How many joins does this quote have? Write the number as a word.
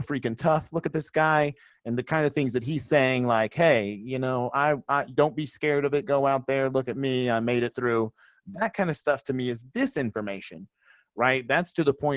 zero